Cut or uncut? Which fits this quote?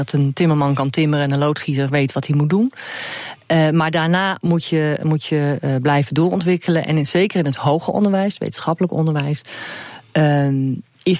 uncut